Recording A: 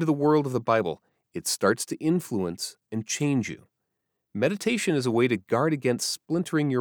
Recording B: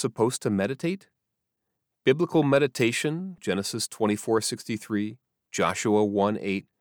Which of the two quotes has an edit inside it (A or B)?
B